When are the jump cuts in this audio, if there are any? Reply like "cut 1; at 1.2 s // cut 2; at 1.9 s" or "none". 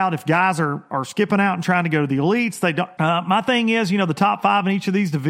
cut 1; at 3.0 s